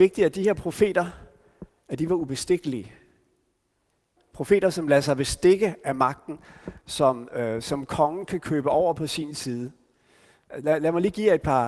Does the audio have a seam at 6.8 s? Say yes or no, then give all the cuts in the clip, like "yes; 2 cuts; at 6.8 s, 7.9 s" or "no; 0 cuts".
no; 2 cuts; at 4.2 s, 10.5 s